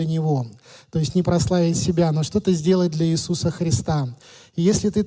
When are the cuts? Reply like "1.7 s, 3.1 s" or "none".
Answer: 1.2 s